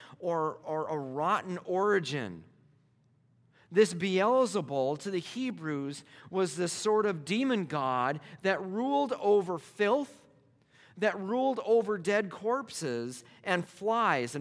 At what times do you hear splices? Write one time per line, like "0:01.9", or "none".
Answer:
none